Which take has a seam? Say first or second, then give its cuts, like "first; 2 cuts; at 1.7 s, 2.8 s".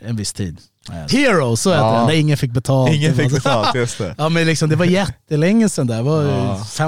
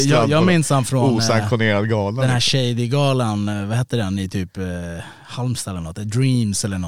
first; 1 cut; at 1.1 s